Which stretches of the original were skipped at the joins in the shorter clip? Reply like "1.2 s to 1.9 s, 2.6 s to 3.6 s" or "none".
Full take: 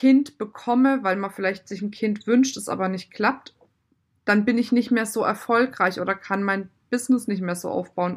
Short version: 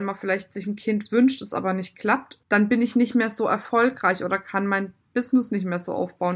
3.6 s to 4.2 s